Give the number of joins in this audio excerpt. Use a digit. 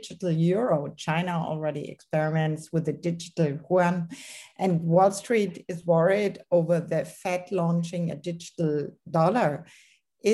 0